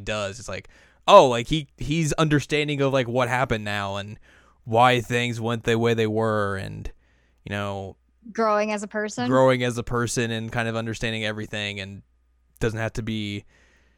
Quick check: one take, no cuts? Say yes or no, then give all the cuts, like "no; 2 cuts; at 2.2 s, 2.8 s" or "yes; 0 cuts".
yes; 0 cuts